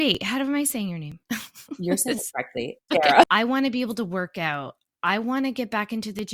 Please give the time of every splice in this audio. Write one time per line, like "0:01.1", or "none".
0:01.2
0:03.2